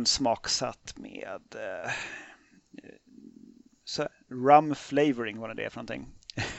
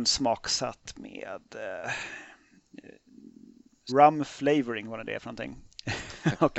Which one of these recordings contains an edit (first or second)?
second